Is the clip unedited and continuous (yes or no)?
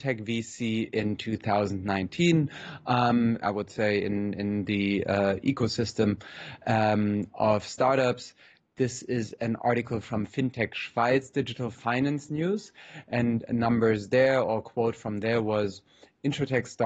no